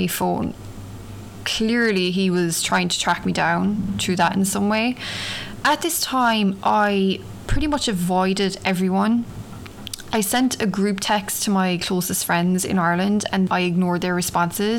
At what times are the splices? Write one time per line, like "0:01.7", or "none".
0:05.6
0:13.5